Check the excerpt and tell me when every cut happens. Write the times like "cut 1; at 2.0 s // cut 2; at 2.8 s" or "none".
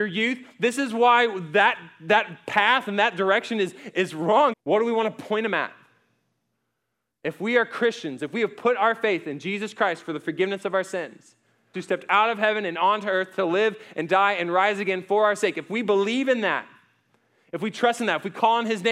cut 1; at 4.5 s // cut 2; at 11.7 s